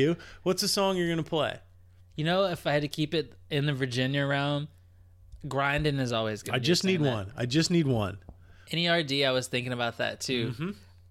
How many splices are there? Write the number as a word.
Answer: three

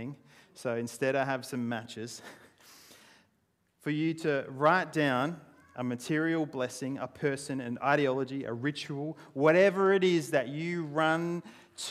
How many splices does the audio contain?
zero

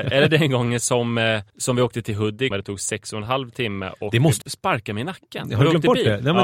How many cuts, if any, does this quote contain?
three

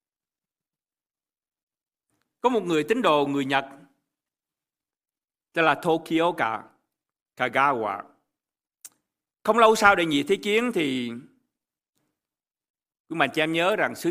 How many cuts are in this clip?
zero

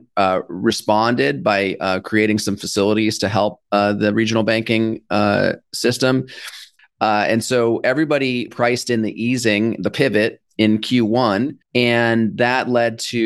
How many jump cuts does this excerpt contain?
three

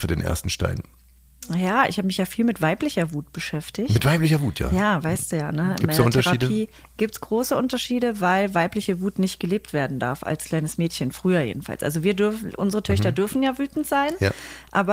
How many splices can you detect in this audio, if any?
zero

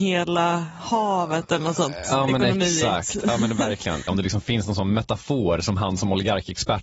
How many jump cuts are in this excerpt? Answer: one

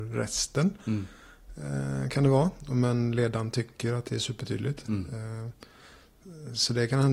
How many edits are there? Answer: zero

